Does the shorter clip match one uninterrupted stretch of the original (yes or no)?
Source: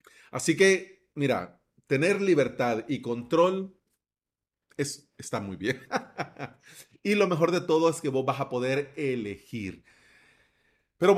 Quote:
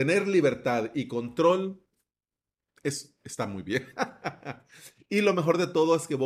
yes